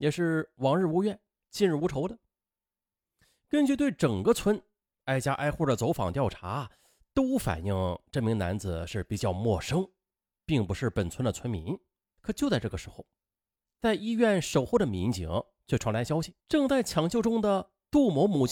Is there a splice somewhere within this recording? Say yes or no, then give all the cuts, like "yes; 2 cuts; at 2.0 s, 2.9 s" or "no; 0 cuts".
yes; 2 cuts; at 12.2 s, 16.4 s